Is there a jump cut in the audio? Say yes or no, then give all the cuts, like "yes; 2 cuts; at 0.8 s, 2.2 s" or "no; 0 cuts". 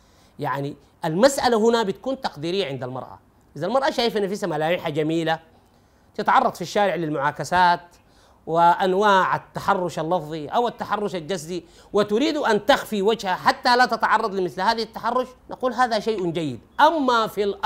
yes; 1 cut; at 15.4 s